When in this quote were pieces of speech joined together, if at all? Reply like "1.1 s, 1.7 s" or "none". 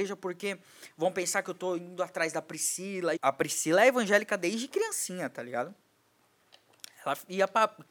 3.2 s